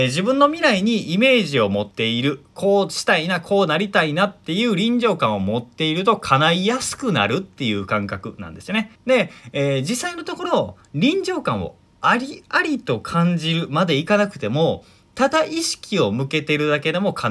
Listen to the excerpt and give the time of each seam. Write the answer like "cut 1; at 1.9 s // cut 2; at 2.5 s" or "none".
cut 1; at 1.9 s // cut 2; at 9.0 s